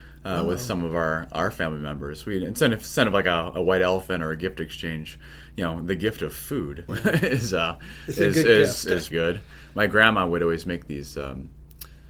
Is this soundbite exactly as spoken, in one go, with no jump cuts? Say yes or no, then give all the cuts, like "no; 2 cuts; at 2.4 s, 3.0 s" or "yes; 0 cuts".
no; 2 cuts; at 6.9 s, 9.1 s